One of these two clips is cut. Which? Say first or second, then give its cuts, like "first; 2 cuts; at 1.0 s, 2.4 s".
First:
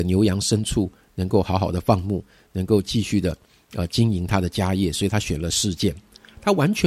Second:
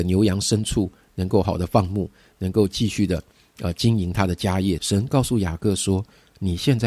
second; 2 cuts; at 1.4 s, 4.8 s